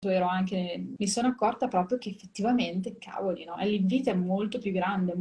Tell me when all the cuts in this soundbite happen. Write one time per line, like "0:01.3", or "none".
0:01.0
0:03.6